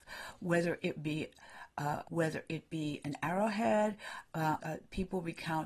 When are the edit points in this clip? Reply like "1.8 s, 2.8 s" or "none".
2.0 s, 4.6 s